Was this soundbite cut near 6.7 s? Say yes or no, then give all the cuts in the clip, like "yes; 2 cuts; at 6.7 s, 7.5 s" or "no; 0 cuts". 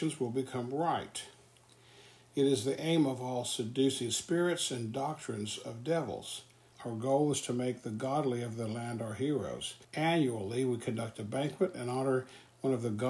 yes; 2 cuts; at 6.7 s, 9.8 s